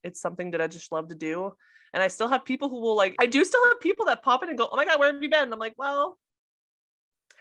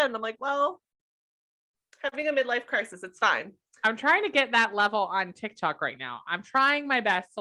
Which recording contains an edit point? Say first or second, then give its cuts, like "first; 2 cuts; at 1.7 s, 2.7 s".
first; 1 cut; at 3.1 s